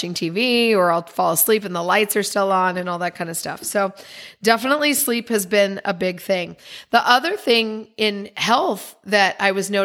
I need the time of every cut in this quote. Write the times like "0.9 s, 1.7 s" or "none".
none